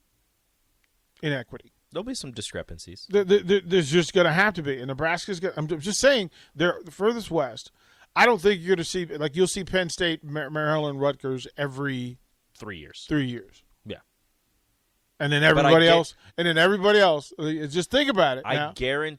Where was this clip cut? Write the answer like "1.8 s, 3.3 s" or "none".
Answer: none